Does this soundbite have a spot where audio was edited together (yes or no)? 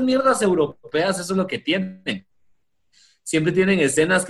no